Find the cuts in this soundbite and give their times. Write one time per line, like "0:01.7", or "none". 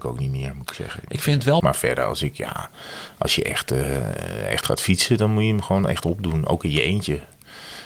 0:01.6